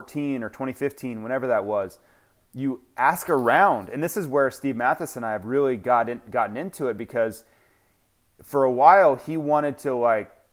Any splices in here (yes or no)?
no